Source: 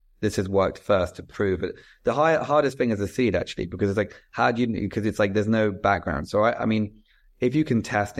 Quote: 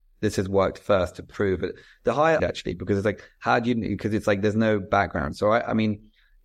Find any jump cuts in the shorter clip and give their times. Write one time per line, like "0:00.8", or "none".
0:02.4